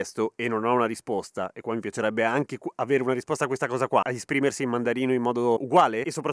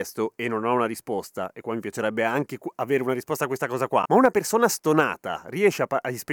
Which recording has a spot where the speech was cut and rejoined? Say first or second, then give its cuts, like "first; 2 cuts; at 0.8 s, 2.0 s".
first; 1 cut; at 4.0 s